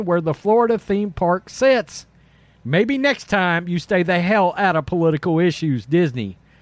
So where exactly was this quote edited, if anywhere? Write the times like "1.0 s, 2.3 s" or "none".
2.6 s